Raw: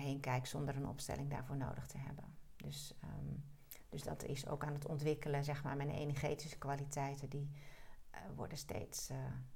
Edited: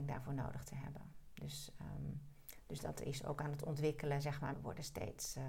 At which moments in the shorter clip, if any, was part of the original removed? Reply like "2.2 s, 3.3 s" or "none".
4.5 s